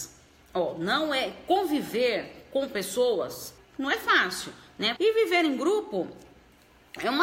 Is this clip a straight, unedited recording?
no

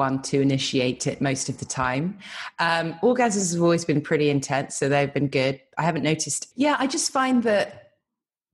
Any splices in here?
yes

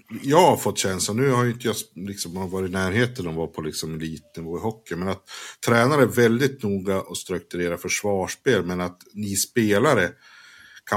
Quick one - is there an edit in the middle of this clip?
no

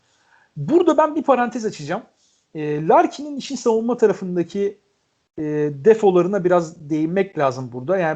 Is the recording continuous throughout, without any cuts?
yes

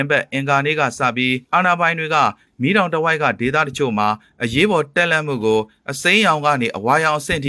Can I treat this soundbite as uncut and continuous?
no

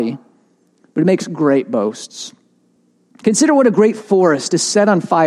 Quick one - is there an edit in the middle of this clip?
no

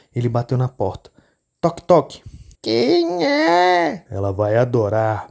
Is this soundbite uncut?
no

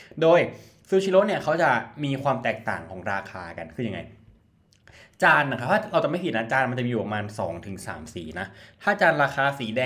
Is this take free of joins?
yes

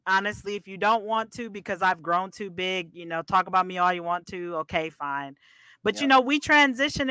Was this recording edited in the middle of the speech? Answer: no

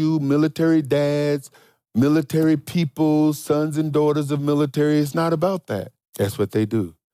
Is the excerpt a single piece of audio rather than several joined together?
no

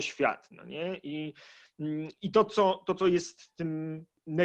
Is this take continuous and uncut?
yes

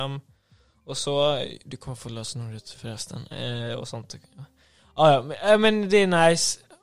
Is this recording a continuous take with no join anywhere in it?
yes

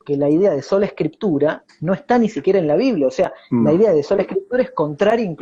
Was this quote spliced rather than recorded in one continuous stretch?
no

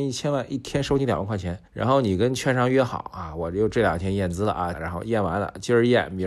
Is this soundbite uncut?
no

